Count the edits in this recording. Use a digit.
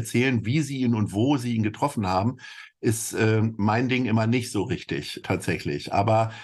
1